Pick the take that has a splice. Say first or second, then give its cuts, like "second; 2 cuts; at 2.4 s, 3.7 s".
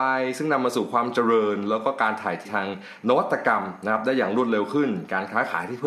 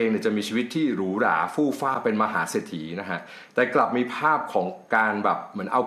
first; 1 cut; at 2.4 s